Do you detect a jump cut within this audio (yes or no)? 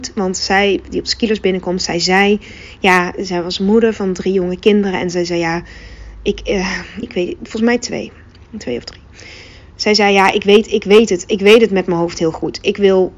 yes